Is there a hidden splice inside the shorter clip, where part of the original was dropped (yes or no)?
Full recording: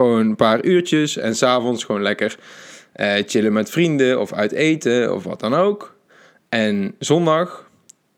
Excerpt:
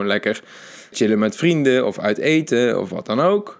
yes